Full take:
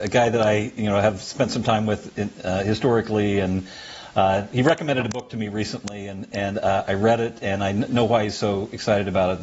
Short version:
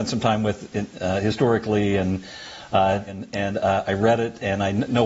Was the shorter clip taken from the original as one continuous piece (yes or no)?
no